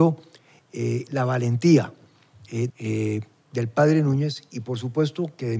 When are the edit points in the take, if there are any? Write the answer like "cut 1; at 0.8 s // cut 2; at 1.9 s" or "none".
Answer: cut 1; at 2.7 s

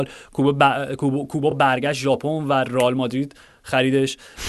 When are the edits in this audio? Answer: none

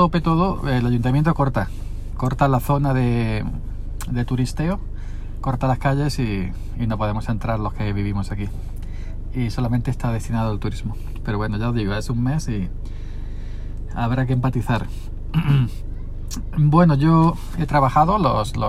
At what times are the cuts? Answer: none

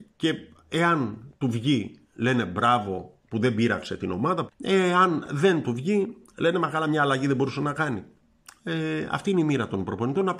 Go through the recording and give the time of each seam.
cut 1; at 4.5 s

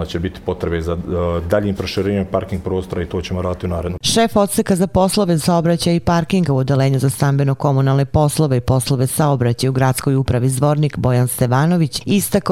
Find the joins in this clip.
none

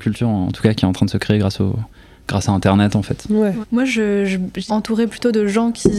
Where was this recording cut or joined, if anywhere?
cut 1; at 3.6 s // cut 2; at 4.7 s

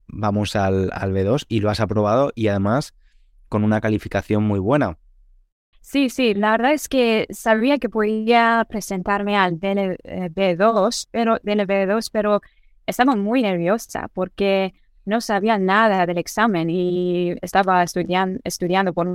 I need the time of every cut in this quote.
cut 1; at 5.7 s

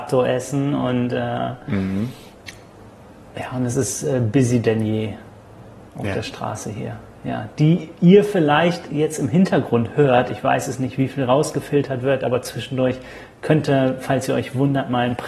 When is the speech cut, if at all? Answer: none

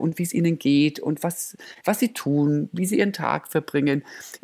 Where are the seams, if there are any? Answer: none

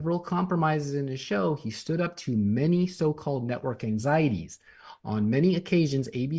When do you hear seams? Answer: none

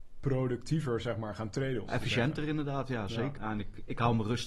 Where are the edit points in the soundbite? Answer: cut 1; at 1.9 s // cut 2; at 3.4 s

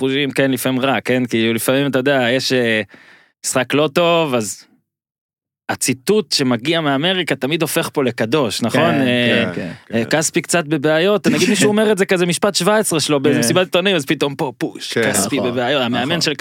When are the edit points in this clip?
none

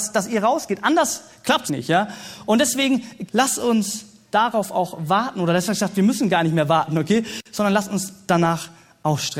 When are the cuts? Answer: cut 1; at 1.7 s // cut 2; at 3.3 s

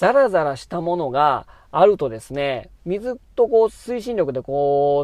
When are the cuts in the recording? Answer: none

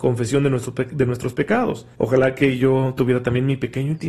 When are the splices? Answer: cut 1; at 1.9 s

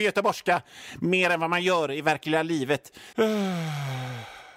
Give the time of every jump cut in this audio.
cut 1; at 3.1 s

